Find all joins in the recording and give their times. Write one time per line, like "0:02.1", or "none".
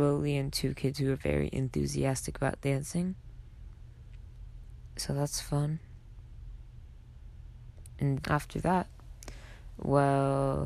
0:08.2